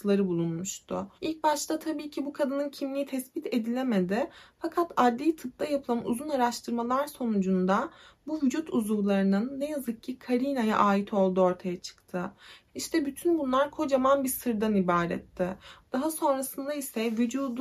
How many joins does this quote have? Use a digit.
3